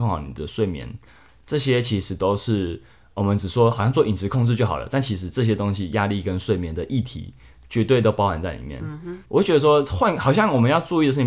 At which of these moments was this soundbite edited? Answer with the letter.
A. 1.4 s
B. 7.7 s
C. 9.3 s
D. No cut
C